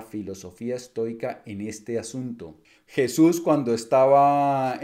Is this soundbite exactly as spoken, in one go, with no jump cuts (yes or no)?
no